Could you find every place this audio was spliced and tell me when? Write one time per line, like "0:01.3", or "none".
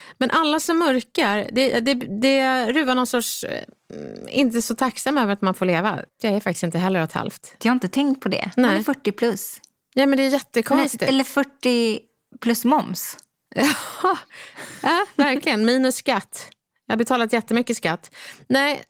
0:06.2
0:07.6

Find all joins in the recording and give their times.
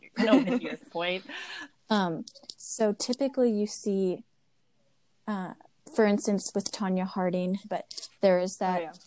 0:01.7
0:07.6

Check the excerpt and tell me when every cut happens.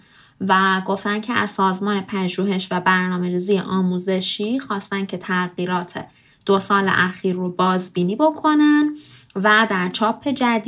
none

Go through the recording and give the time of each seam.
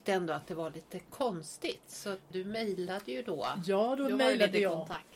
0:02.3

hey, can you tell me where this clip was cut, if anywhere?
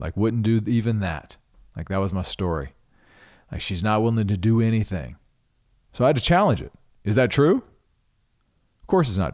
0:05.9

